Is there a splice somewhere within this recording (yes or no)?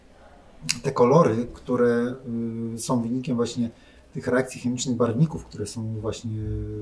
no